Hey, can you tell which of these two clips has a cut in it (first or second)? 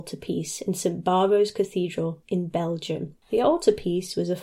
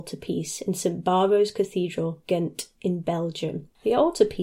first